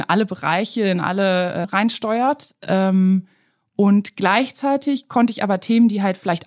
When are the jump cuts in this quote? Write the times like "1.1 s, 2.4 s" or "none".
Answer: 1.6 s